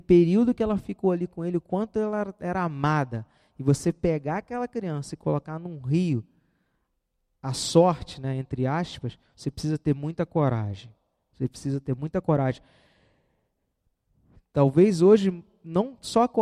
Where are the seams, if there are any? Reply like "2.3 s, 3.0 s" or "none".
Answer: none